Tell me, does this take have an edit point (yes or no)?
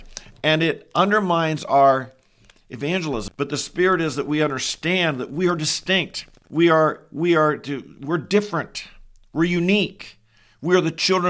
yes